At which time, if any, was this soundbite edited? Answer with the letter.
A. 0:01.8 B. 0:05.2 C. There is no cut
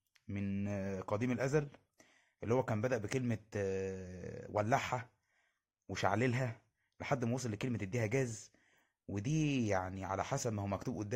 C